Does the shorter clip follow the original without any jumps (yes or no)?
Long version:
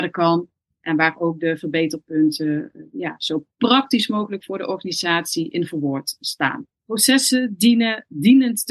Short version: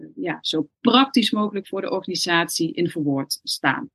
yes